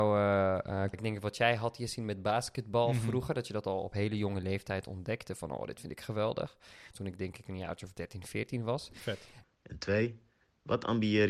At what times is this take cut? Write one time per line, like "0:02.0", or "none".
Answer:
0:00.9
0:06.9
0:09.4